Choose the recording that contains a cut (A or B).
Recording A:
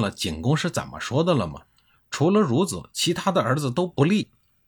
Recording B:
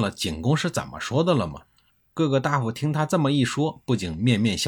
B